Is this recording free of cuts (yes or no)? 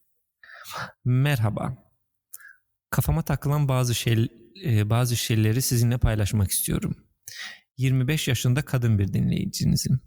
yes